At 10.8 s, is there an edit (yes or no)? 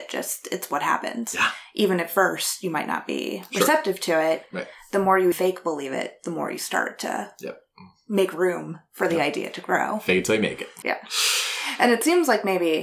yes